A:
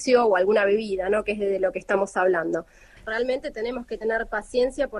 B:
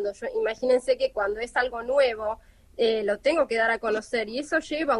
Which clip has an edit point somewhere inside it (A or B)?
A